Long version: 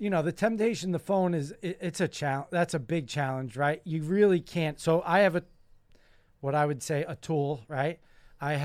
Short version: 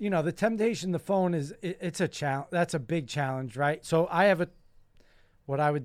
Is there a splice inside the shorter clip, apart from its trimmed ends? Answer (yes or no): yes